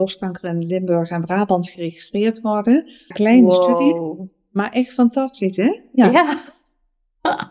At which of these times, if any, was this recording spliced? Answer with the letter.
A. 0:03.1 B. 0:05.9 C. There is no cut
A